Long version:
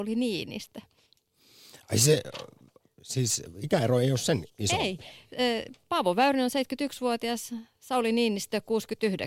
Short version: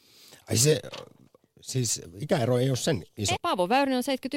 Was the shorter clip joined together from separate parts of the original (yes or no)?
yes